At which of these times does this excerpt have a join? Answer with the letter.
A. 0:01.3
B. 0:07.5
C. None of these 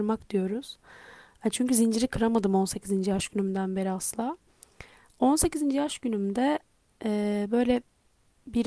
C